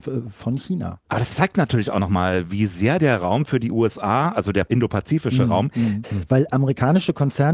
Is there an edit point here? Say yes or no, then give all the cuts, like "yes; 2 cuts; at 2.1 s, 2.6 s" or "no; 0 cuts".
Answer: yes; 2 cuts; at 1.0 s, 6.0 s